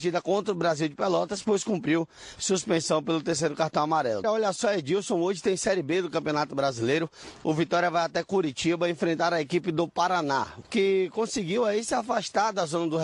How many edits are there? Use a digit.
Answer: 2